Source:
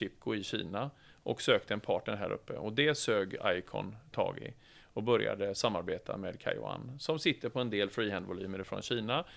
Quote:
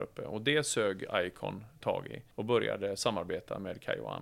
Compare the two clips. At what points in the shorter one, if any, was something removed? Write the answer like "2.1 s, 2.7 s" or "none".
2.3 s